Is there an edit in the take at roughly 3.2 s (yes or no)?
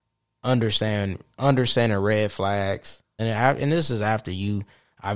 yes